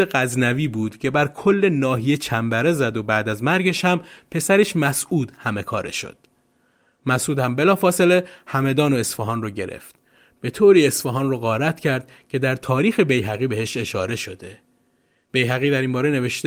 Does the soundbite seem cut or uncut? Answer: uncut